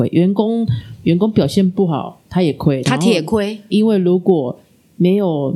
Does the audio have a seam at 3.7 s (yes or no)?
yes